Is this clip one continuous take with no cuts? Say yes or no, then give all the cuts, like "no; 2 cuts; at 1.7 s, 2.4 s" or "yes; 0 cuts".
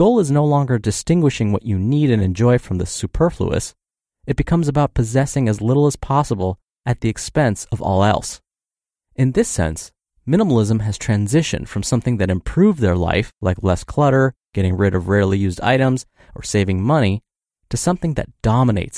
yes; 0 cuts